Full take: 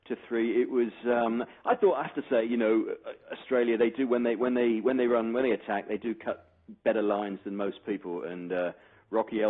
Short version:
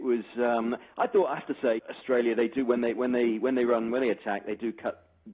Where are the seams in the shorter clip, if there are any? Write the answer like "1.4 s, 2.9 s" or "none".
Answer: 1.8 s

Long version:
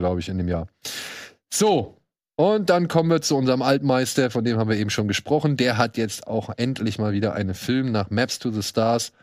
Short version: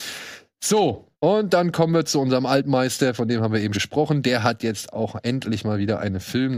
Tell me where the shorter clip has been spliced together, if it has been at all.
1.1 s, 3.7 s

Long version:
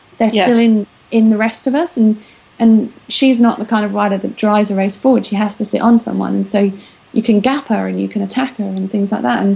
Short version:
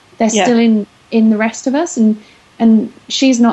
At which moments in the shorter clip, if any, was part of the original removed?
none

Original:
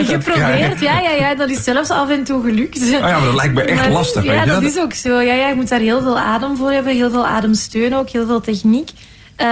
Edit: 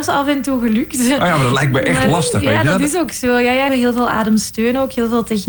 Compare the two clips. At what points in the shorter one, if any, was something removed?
3.7 s

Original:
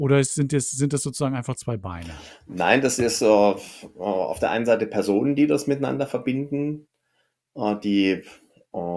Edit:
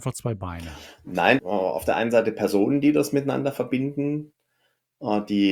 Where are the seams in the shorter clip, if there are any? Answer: 1.4 s

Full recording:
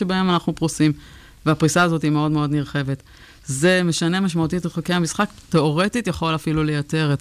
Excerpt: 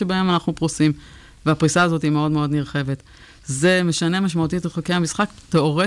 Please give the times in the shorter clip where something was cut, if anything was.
none

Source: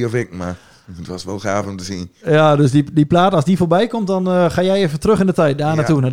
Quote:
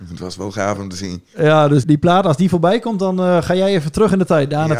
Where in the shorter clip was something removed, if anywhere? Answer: 1.8 s

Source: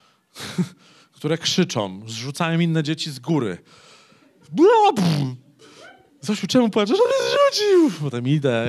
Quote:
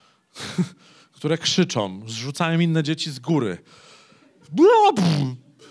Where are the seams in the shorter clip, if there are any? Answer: none

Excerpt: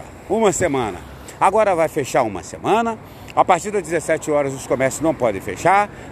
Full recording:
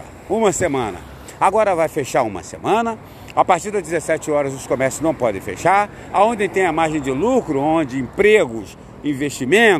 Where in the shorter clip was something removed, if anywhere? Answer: none

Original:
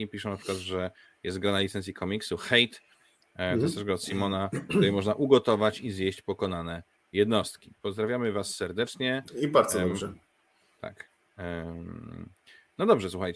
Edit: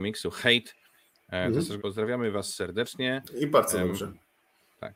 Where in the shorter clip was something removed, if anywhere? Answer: 1.8 s

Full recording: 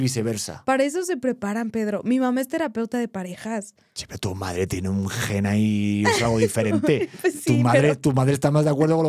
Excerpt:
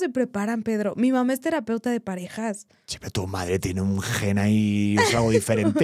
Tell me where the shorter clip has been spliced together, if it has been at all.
none

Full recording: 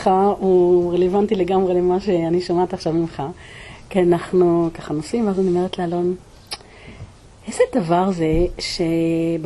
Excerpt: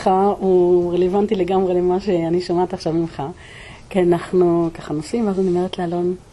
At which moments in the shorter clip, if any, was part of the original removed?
none

